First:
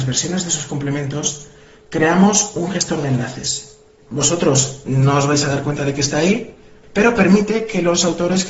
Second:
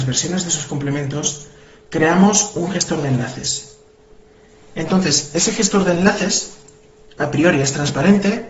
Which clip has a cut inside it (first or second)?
first